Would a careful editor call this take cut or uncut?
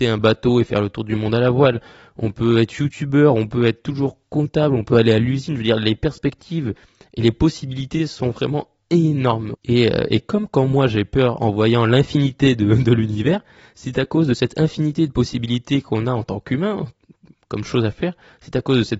cut